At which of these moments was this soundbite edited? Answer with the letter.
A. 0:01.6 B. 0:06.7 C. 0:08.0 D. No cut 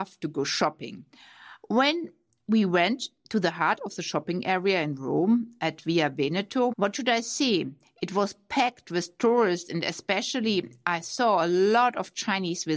B